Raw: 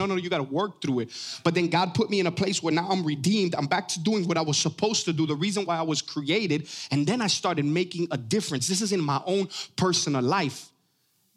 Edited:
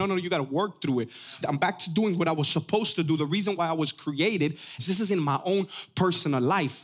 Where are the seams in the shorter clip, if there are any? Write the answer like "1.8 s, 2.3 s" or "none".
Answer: 1.4 s, 4.8 s